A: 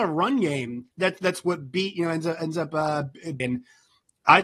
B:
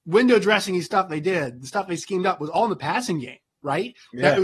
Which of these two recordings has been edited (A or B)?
A